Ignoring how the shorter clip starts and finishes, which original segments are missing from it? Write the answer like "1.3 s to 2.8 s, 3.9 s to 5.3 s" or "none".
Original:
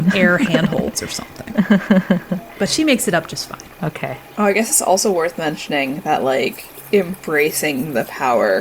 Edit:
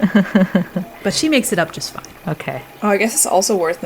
none